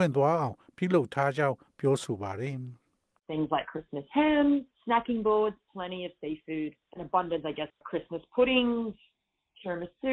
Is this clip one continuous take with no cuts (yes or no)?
no